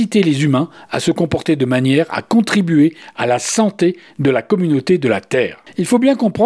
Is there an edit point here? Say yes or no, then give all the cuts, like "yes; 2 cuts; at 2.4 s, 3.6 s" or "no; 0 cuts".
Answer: no; 0 cuts